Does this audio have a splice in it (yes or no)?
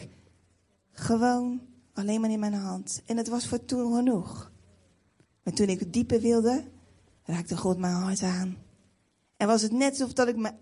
no